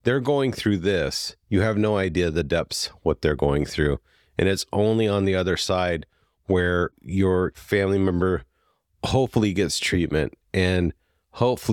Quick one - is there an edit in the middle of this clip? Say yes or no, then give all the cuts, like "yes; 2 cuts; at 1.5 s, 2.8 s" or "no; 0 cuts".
no; 0 cuts